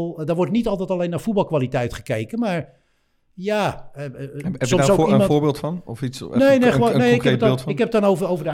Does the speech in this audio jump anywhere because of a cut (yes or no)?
no